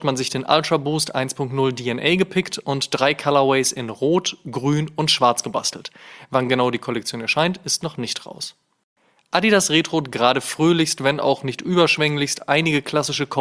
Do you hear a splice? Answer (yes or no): no